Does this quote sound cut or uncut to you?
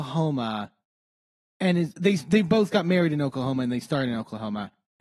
uncut